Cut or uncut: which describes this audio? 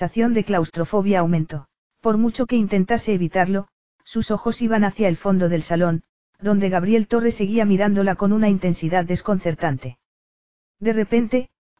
cut